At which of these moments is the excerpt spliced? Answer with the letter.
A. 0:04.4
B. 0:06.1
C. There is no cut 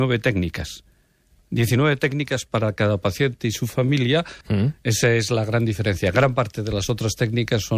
A